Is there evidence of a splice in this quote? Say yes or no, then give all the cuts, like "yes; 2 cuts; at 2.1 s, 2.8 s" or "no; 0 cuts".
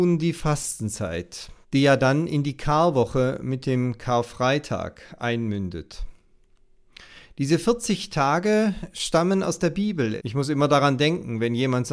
yes; 2 cuts; at 1.6 s, 10.2 s